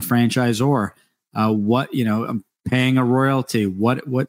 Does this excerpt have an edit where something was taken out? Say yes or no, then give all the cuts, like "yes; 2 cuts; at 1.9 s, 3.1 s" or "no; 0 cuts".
no; 0 cuts